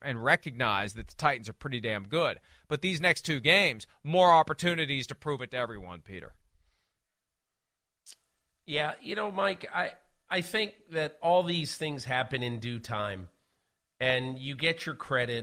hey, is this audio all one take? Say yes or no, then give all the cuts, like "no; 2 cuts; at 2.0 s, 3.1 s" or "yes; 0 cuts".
yes; 0 cuts